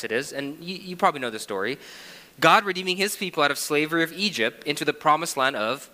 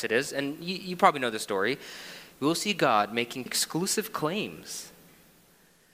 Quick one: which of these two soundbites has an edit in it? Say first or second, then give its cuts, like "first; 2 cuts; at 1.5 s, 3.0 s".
second; 2 cuts; at 2.3 s, 3.5 s